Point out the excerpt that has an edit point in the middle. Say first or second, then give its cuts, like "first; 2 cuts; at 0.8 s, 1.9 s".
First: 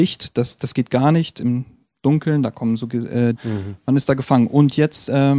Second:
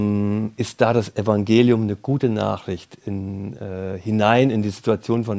first; 1 cut; at 3.3 s